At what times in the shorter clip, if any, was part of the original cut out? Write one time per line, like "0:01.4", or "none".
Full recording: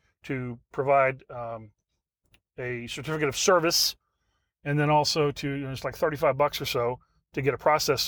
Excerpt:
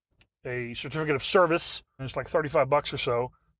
0:02.0

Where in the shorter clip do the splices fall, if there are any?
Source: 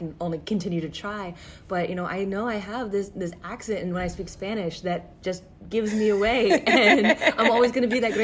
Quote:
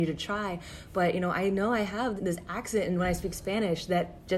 0:02.2

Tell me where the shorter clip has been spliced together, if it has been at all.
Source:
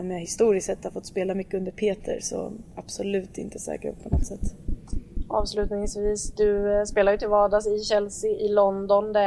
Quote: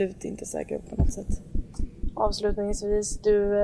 none

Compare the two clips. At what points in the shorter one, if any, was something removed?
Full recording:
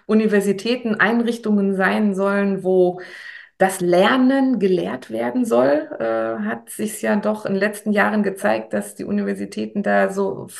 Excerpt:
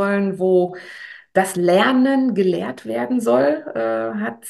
none

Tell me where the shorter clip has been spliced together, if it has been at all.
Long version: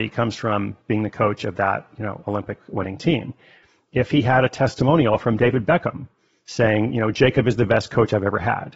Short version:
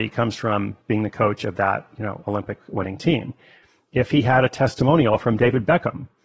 none

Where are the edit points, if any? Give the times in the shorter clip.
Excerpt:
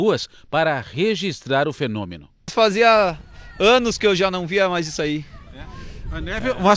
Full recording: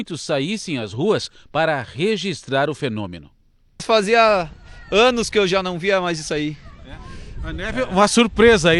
0:02.4

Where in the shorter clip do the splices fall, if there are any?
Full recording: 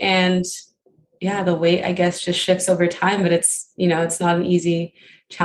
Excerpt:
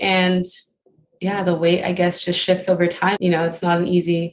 0:03.2

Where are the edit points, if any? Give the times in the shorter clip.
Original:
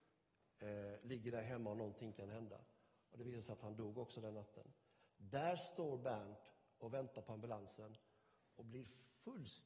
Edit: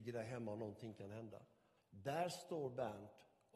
0:01.8

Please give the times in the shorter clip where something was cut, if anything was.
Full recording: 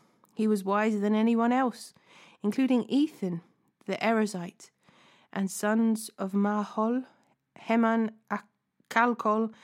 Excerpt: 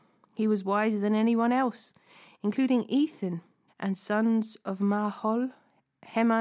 0:03.7

